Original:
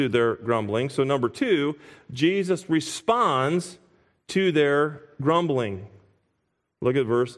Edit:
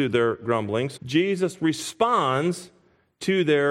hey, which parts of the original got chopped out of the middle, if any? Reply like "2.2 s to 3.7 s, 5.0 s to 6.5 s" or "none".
1.0 s to 2.0 s